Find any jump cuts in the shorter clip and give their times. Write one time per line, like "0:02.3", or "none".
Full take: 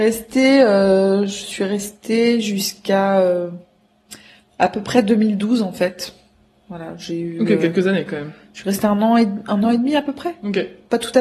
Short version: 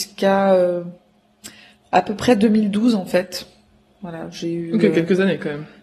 none